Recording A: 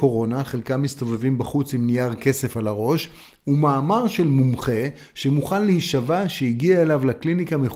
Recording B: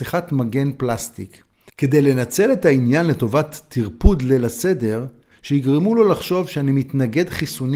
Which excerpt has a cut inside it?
B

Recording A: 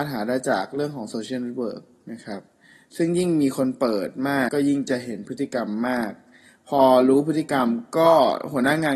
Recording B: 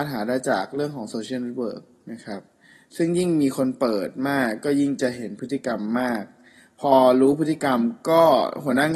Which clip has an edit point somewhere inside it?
A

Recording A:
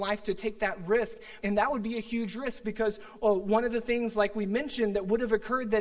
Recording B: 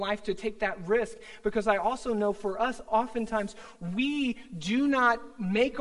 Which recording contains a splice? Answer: A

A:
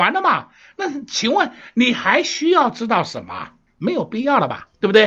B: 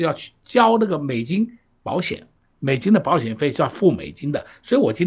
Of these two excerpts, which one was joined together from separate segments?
A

